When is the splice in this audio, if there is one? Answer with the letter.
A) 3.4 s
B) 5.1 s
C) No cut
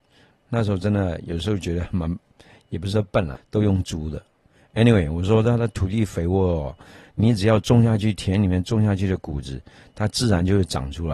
A